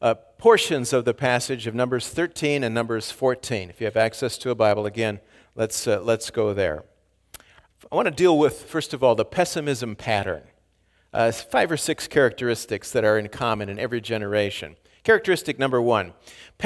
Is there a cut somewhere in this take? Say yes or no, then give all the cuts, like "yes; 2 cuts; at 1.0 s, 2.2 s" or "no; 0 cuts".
no; 0 cuts